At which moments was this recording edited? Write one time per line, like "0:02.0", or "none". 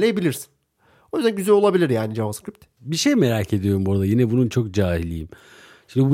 0:02.8